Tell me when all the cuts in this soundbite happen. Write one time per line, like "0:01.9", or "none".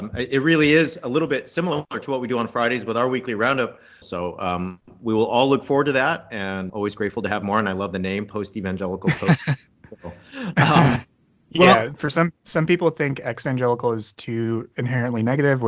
0:04.0
0:06.7